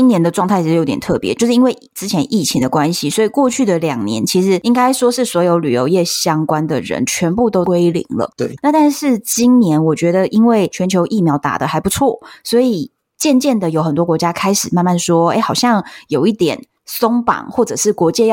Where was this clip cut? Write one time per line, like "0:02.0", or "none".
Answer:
none